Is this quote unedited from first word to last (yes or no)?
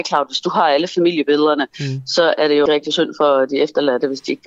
no